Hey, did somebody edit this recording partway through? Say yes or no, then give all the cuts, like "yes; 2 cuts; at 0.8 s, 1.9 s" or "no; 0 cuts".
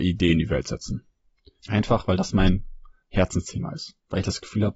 yes; 1 cut; at 1.6 s